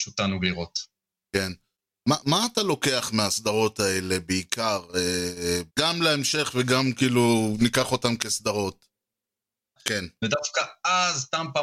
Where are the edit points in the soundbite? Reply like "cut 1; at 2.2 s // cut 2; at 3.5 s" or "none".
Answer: cut 1; at 5.7 s // cut 2; at 9.8 s